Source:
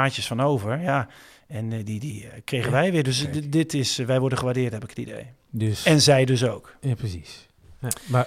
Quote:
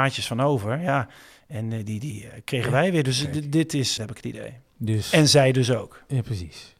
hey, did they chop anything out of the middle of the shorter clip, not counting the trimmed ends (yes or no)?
yes